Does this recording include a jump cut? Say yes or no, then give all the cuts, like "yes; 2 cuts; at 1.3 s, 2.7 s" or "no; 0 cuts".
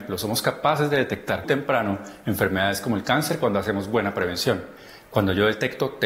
yes; 1 cut; at 1.4 s